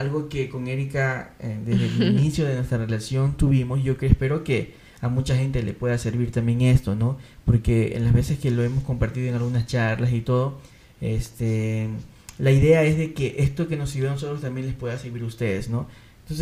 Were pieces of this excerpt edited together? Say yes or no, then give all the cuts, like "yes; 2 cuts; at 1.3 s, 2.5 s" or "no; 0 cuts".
no; 0 cuts